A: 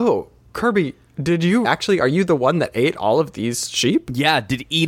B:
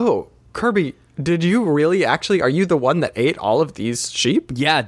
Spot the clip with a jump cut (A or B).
A